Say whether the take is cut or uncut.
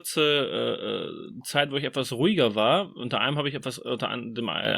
uncut